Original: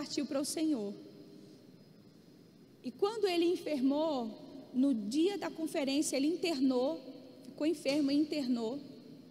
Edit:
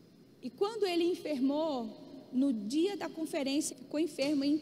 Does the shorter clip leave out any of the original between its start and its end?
yes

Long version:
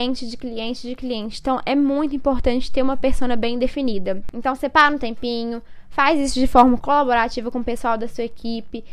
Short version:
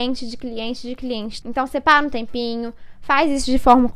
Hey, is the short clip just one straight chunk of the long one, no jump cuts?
no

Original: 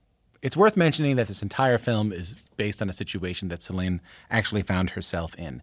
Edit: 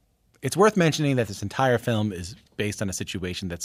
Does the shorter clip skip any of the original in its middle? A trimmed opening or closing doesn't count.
no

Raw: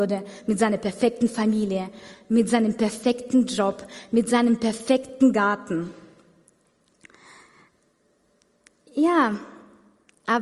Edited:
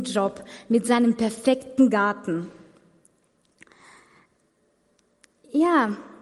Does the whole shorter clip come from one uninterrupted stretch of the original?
yes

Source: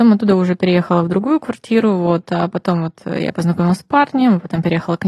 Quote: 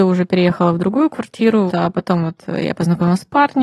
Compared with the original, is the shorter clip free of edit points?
no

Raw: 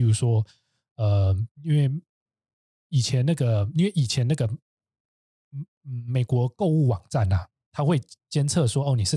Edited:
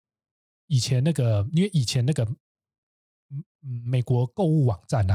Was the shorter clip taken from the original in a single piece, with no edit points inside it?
yes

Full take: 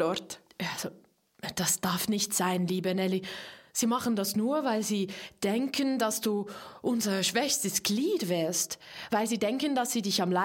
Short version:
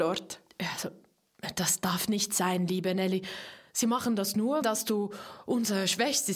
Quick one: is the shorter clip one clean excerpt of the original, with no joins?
no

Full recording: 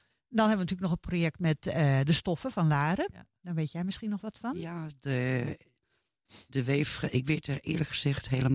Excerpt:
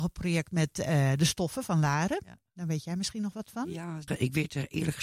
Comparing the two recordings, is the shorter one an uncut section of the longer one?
no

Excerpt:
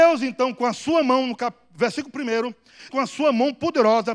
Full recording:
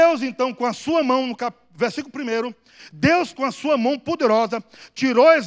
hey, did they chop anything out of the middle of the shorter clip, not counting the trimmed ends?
yes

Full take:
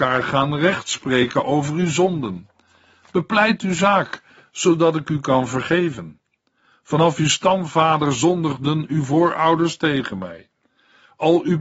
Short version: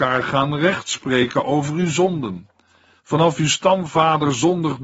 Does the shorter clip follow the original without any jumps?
no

